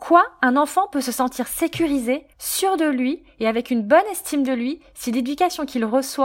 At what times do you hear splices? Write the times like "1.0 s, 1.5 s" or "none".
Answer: 2.3 s